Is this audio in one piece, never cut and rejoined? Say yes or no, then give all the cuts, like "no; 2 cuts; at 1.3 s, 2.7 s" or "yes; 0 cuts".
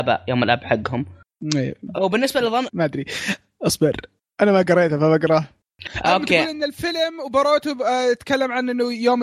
no; 1 cut; at 2.7 s